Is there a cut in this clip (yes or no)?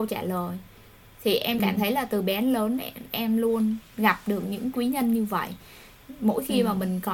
no